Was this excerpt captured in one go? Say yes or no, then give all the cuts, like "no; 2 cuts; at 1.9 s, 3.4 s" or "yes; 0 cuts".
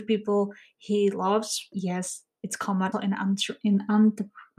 no; 2 cuts; at 1.7 s, 2.9 s